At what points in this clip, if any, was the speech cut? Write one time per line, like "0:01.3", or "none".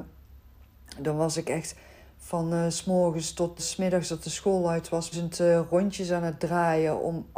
0:03.6
0:05.1